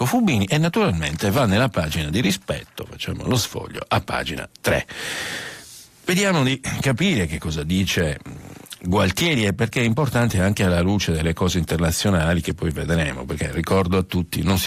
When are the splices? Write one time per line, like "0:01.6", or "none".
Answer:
none